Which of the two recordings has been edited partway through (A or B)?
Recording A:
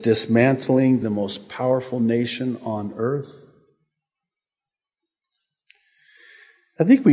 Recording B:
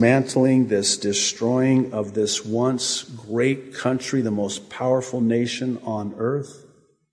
A